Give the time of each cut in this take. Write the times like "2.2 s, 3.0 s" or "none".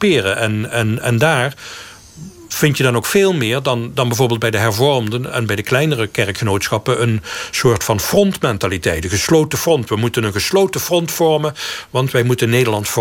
none